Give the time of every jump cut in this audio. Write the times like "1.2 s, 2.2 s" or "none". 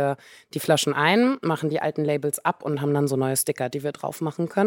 none